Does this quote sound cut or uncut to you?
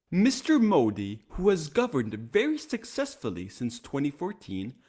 uncut